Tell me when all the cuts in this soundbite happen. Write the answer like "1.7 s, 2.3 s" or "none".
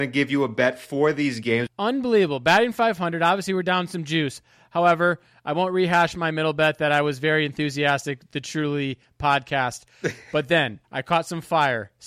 1.7 s, 10.8 s

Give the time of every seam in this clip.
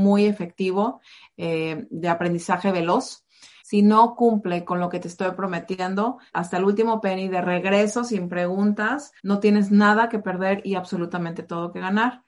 3.6 s, 6.3 s, 9.2 s

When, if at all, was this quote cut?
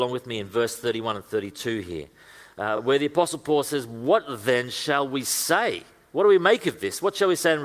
none

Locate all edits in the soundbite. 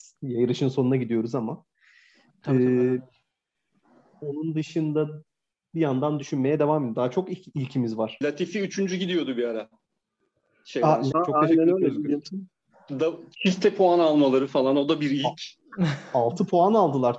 8.2 s, 11.1 s

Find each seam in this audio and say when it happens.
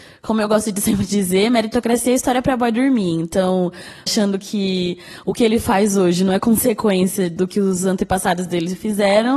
4.1 s

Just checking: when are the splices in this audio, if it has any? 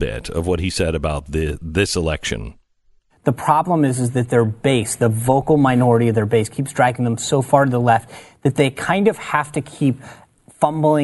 none

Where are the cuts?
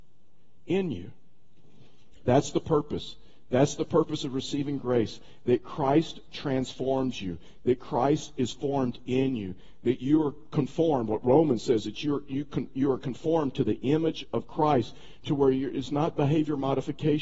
none

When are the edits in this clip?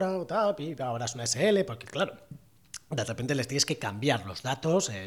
none

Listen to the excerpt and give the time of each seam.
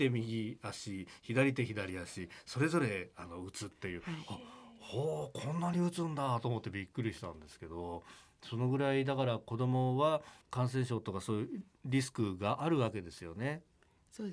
10.4 s

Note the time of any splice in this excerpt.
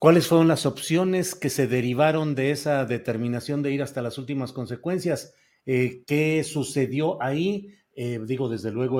none

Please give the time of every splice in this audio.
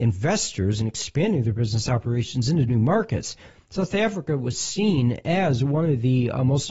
none

